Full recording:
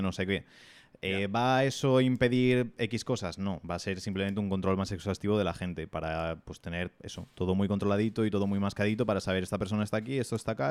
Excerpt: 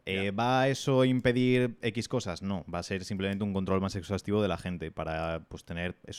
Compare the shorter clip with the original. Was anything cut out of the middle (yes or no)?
no